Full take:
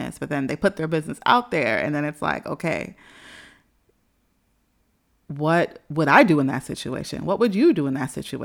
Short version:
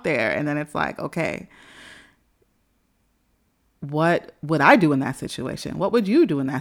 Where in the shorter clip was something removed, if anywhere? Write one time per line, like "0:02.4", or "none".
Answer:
none